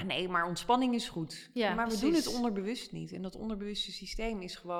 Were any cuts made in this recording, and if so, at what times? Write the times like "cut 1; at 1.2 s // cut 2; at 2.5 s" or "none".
none